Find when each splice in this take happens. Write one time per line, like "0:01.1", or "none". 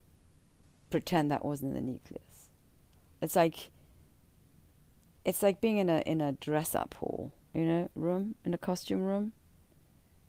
none